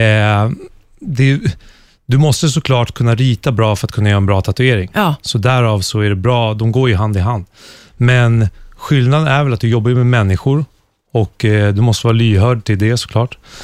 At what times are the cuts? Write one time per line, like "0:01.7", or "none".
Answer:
none